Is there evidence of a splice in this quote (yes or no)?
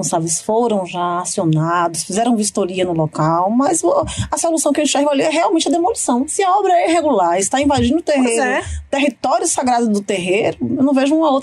no